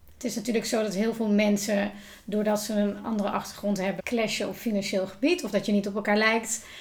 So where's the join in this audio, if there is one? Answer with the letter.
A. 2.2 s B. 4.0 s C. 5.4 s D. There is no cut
B